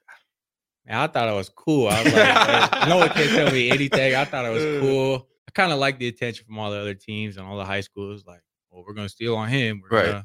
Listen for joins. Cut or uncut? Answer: cut